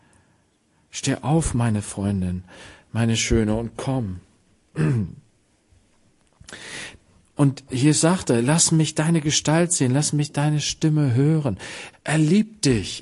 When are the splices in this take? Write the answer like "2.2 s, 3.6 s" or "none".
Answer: 11.9 s